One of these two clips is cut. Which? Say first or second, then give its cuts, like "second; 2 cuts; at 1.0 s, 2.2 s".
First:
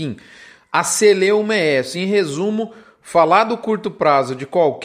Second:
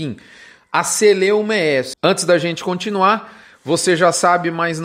second; 1 cut; at 1.9 s